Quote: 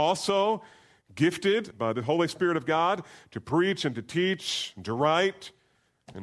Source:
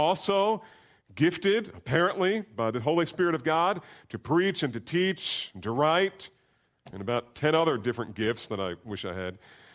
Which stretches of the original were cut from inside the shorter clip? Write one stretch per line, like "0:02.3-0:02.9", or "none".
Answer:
0:01.7-0:02.5